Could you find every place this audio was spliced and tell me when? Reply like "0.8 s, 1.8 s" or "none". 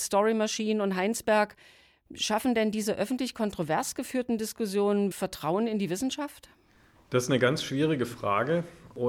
5.1 s

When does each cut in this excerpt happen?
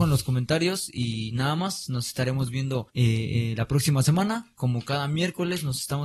2.9 s

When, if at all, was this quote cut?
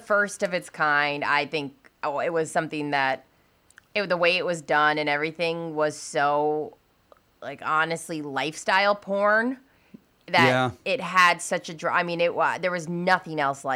none

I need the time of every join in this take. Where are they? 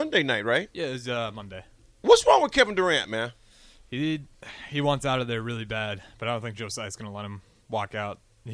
none

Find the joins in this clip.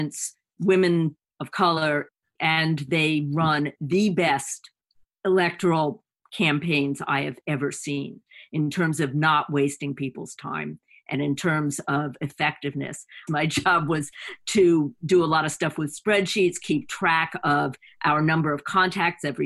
13.3 s

